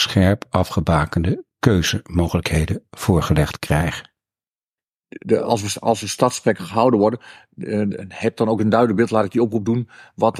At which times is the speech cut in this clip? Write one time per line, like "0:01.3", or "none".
none